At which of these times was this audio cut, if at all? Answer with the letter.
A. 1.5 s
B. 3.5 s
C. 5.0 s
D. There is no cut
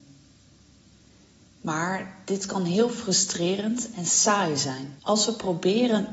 C